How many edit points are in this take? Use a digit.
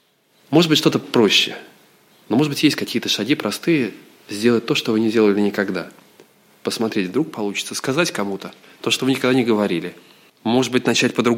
1